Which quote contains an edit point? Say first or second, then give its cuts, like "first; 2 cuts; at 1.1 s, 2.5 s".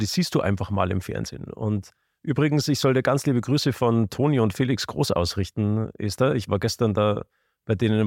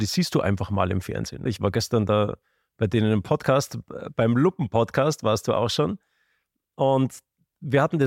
second; 1 cut; at 1.5 s